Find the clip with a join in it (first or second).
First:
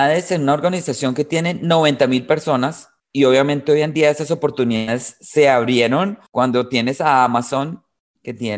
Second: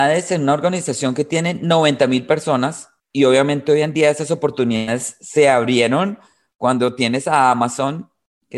first